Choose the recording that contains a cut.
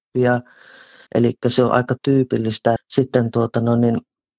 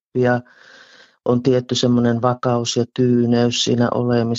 first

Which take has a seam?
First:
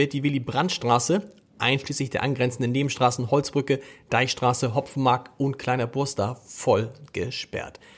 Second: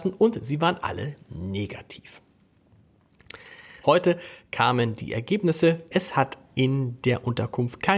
second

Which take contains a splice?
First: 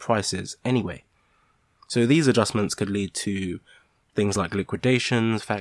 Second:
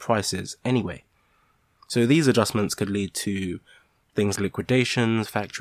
second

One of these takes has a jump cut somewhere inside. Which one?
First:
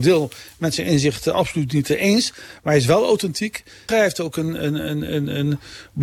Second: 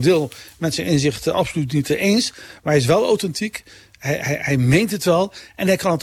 first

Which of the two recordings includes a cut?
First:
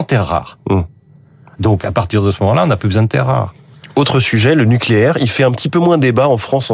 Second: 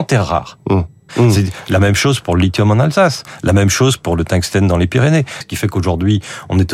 second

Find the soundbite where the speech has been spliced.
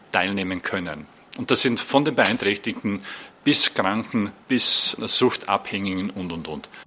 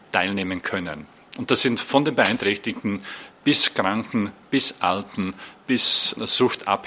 first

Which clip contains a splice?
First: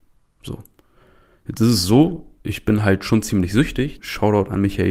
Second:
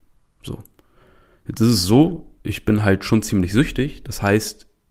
first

